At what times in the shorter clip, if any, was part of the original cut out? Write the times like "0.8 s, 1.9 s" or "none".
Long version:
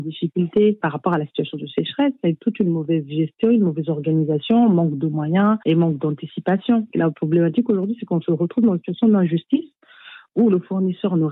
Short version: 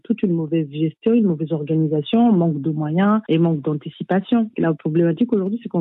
none